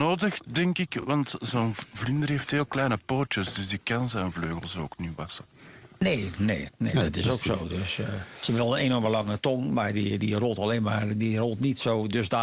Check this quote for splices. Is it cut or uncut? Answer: uncut